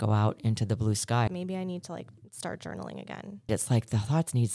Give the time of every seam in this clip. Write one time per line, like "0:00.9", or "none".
0:01.3
0:03.5